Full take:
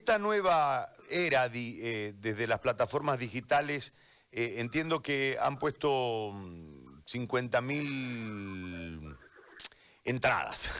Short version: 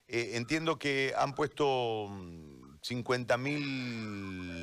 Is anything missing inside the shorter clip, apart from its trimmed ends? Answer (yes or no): no